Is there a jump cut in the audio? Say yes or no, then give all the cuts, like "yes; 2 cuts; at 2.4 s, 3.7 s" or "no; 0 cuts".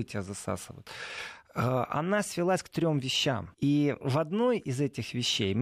yes; 1 cut; at 3.5 s